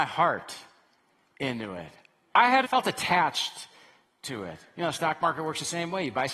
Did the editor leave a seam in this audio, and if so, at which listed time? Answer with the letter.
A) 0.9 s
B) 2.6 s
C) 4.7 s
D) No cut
B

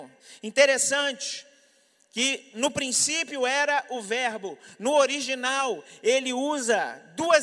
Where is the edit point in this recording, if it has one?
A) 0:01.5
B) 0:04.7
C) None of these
C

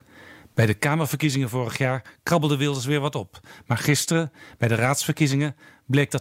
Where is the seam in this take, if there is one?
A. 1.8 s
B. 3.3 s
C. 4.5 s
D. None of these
D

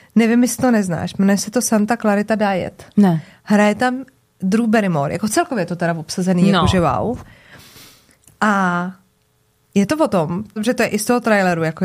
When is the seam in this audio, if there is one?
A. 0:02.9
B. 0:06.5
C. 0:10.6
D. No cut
C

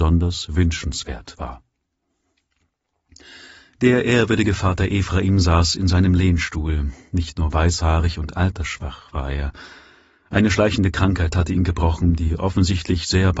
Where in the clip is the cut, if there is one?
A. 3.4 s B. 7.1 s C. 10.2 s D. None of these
D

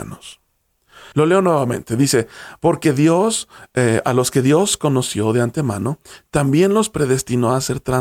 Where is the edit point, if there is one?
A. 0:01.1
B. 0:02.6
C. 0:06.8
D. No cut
A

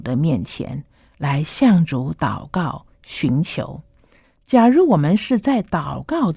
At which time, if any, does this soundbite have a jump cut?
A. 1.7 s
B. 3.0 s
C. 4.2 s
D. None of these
C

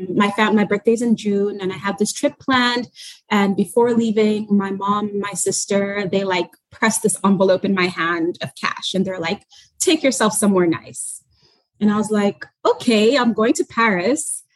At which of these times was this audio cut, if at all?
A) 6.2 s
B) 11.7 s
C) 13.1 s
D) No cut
D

